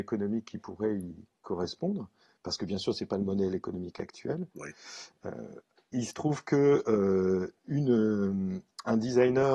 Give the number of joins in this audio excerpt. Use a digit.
0